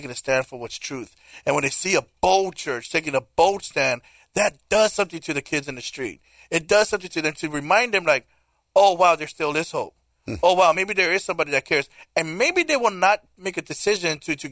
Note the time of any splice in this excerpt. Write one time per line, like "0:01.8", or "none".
none